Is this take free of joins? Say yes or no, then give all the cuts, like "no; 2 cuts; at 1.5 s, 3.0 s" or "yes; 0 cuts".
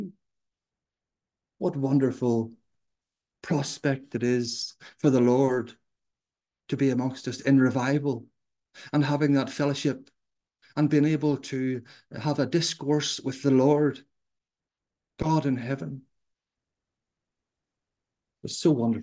yes; 0 cuts